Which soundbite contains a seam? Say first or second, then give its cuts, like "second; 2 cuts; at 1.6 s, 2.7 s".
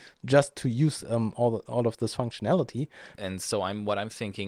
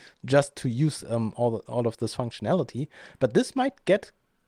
first; 1 cut; at 3.2 s